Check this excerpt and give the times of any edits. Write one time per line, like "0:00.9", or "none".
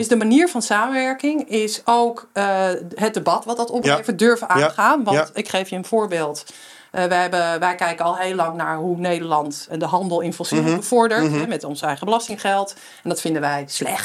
0:09.7